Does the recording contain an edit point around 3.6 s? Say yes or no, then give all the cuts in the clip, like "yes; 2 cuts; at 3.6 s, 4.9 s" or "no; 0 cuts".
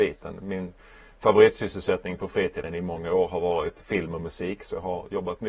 no; 0 cuts